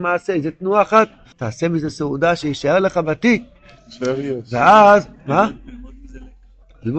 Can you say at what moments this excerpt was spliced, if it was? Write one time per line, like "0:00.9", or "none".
0:01.3